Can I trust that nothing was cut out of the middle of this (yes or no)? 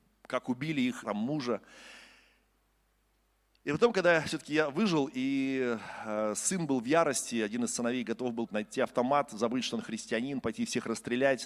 no